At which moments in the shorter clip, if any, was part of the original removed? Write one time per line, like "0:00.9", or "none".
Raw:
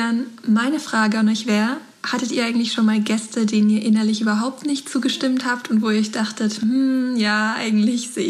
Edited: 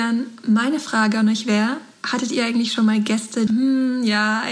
0:03.5